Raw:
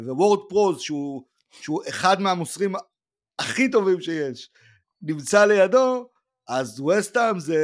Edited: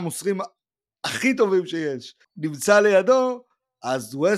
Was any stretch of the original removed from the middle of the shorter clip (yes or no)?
yes